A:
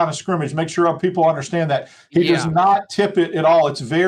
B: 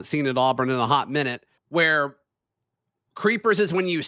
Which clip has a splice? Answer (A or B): B